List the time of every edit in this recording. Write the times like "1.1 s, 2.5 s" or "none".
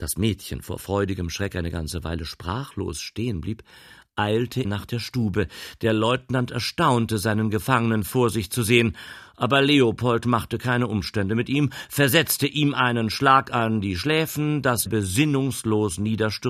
4.6 s, 14.9 s